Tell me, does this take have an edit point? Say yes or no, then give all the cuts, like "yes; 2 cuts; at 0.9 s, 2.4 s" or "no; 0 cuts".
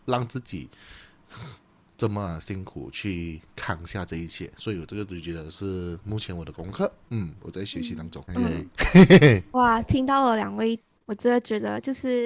yes; 1 cut; at 8.2 s